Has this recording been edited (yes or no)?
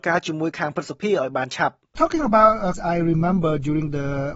yes